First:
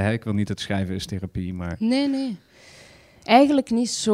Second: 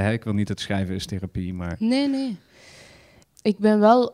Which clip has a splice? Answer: second; 1 cut; at 3.2 s

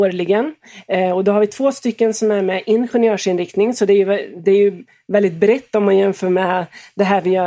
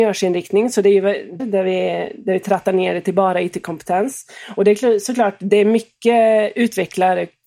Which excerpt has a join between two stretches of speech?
second; 1 cut; at 1.4 s

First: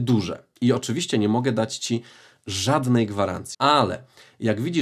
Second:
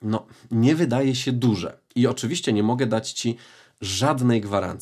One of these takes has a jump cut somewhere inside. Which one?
first; 1 cut; at 3.5 s

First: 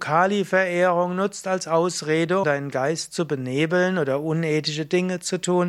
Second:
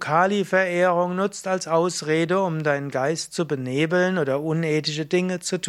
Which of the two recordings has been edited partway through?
first; 1 cut; at 2.4 s

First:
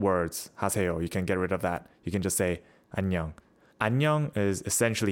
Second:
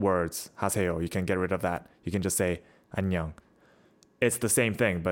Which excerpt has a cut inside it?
first; 1 cut; at 3.7 s

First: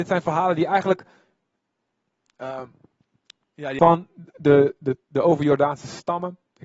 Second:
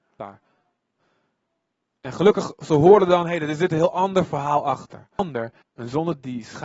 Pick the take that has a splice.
second; 1 cut; at 5.6 s

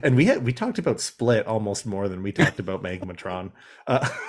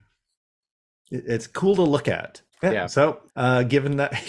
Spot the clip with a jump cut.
second; 1 cut; at 3.3 s

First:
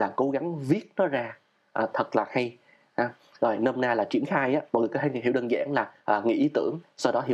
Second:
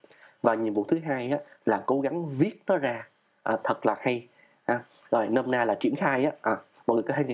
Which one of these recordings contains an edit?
first; 1 cut; at 4.7 s

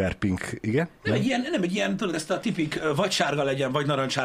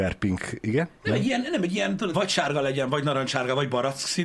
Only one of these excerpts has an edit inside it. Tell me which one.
second; 1 cut; at 2.1 s

